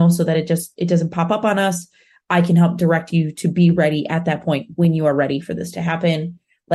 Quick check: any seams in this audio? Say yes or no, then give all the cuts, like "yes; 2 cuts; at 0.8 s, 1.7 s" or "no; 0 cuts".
no; 0 cuts